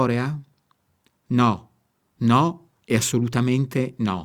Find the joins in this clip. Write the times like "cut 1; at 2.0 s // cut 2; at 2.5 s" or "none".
none